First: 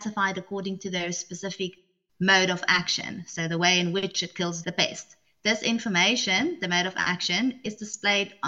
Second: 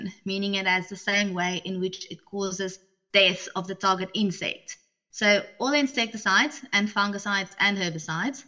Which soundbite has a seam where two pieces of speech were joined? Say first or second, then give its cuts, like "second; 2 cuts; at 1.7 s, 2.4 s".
first; 1 cut; at 4.6 s